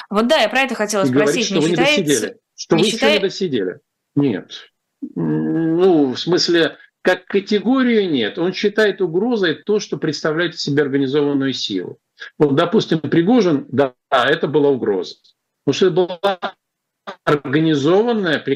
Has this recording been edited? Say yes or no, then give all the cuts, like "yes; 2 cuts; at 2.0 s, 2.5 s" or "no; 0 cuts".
yes; 1 cut; at 4.1 s